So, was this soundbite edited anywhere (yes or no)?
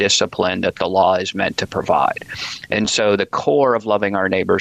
no